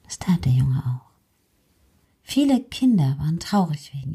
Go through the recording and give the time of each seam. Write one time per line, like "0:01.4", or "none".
0:02.0